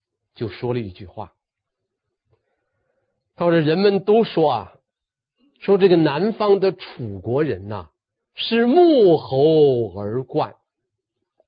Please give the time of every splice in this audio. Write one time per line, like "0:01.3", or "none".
none